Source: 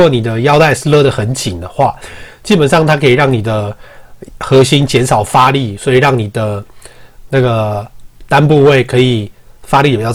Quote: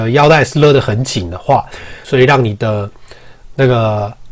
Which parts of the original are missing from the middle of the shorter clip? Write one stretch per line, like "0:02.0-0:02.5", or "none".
0:02.3-0:05.8